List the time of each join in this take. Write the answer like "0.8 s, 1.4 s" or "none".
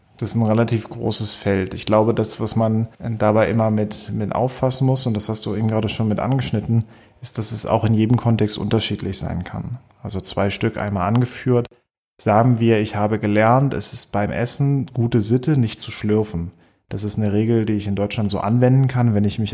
2.9 s